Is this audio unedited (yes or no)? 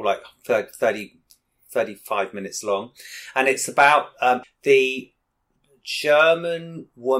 no